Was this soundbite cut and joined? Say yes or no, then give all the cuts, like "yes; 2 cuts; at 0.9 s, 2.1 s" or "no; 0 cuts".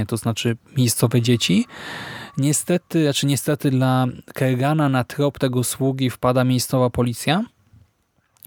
no; 0 cuts